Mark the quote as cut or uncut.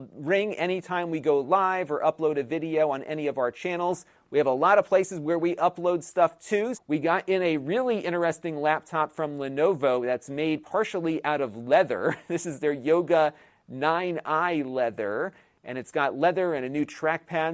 cut